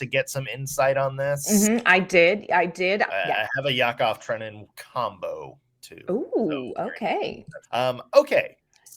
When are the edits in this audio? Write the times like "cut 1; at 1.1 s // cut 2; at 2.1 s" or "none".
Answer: cut 1; at 3.1 s // cut 2; at 7.6 s